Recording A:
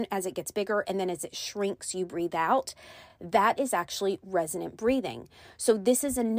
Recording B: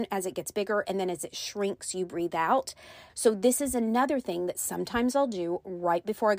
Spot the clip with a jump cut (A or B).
B